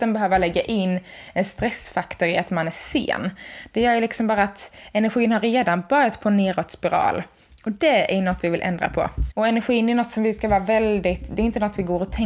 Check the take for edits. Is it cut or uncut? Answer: cut